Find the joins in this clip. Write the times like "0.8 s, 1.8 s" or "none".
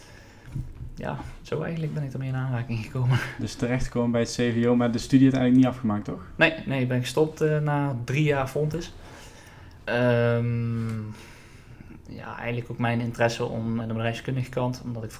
9.8 s, 13.8 s